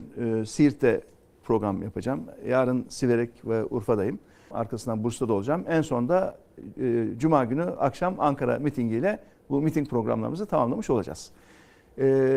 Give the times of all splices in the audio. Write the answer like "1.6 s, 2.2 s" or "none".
4.5 s